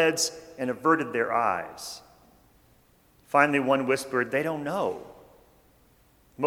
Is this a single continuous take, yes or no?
yes